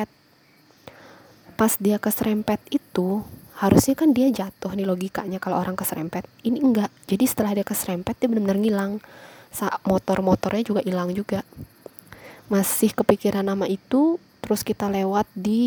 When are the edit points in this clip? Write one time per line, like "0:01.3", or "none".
none